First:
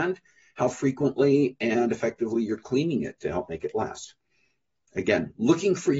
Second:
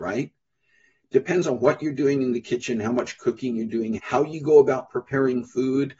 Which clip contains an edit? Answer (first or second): second